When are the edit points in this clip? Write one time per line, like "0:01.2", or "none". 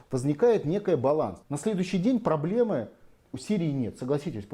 0:01.4
0:03.3